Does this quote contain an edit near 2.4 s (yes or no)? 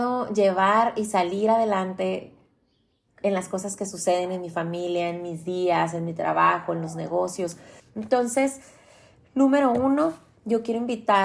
no